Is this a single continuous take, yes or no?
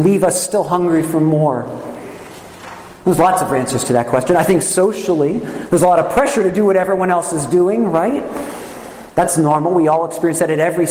yes